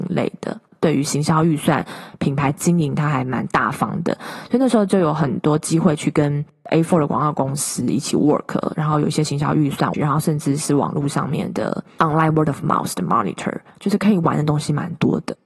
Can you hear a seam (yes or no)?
yes